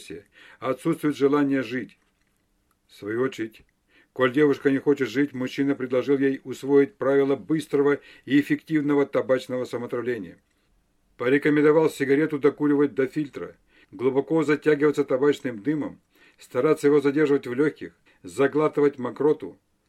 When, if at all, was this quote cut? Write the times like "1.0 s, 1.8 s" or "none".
13.8 s, 18.1 s